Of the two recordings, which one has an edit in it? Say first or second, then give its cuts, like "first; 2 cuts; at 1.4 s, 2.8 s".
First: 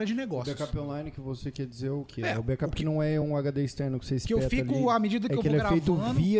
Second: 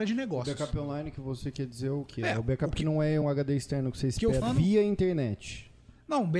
second; 2 cuts; at 3.2 s, 4.4 s